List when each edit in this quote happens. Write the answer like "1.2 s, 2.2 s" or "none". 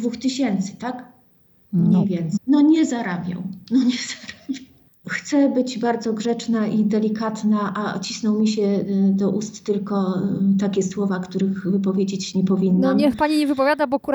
2.4 s